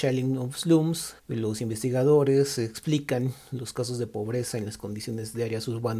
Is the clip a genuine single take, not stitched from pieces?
no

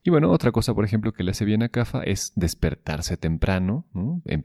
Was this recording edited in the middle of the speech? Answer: no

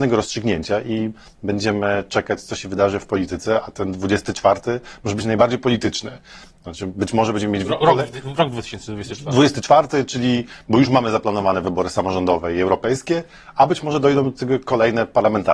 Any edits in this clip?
no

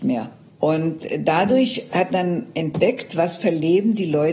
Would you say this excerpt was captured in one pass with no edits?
no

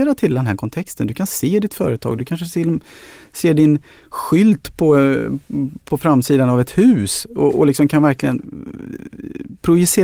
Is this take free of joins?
yes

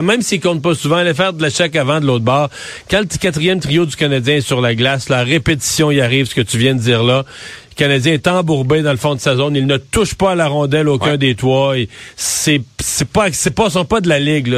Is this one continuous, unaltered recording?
yes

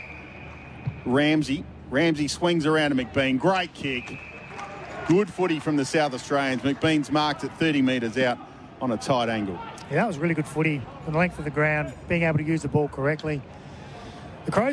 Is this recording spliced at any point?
no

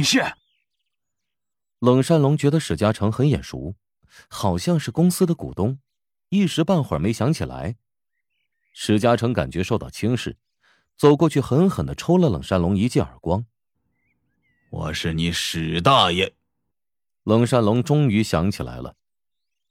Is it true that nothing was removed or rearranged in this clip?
yes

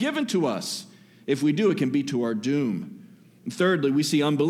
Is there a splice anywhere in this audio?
no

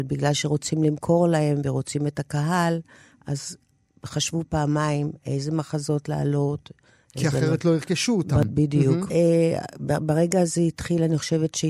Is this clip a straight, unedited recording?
no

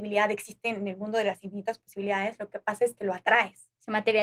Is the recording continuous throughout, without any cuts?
yes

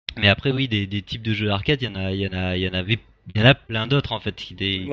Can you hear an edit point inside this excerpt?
no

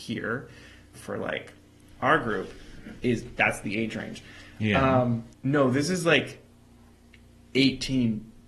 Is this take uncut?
no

